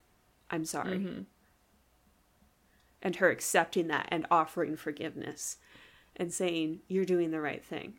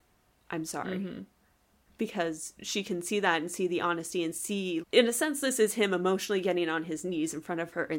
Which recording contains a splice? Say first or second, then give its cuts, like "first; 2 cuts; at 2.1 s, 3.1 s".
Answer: second; 2 cuts; at 1.9 s, 4.8 s